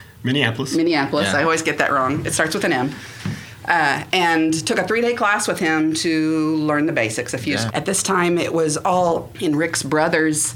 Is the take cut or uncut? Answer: cut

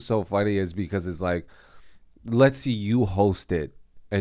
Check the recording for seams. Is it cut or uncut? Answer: uncut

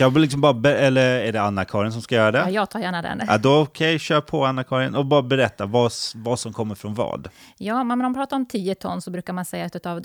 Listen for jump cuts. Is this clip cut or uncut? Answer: uncut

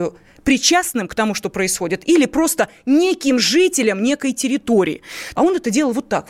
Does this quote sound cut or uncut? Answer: cut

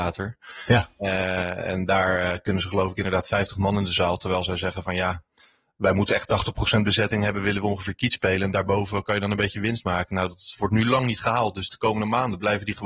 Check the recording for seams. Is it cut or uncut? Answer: uncut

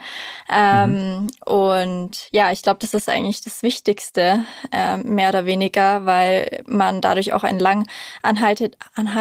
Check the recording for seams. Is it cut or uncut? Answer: uncut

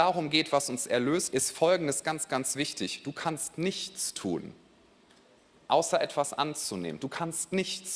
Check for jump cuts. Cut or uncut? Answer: cut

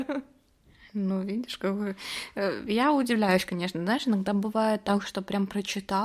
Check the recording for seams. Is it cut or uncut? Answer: uncut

